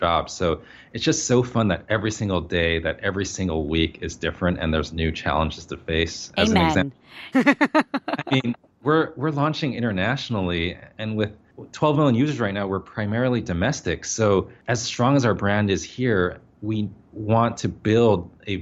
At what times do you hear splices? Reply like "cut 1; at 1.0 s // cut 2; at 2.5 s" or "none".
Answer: cut 1; at 7.3 s